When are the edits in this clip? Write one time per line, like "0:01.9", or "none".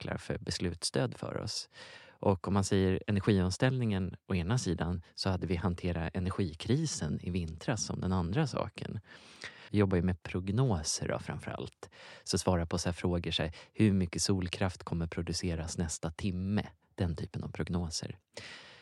0:09.7